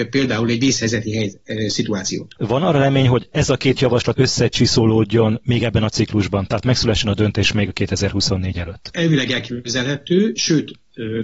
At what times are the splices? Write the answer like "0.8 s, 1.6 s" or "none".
2.4 s, 4.1 s